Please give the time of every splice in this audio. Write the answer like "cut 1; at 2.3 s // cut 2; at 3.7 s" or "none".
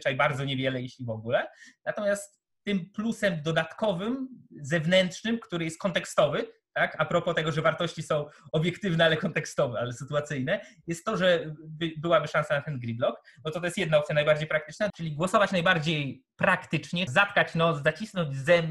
cut 1; at 14.9 s // cut 2; at 17.1 s